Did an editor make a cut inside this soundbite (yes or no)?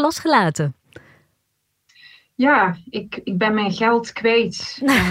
no